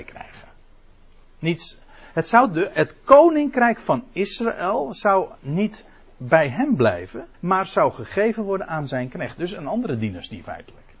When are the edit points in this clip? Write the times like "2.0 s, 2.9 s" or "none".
1.2 s, 7.3 s